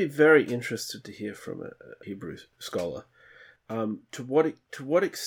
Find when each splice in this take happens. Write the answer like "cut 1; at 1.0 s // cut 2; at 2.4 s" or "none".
cut 1; at 2.0 s